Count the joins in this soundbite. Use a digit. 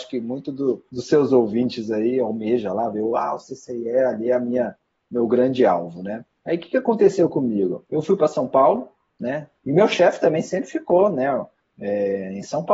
1